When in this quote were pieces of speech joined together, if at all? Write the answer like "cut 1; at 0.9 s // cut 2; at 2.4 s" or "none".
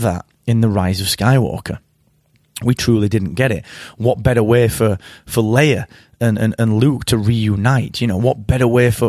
none